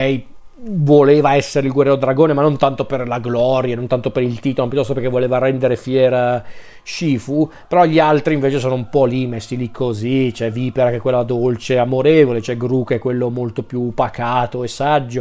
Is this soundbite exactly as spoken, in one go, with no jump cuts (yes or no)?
yes